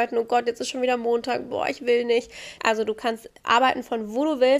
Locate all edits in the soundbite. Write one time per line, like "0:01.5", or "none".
0:02.6